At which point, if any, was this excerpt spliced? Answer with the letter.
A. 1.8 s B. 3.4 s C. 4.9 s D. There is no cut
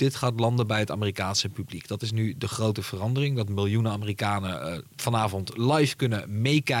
D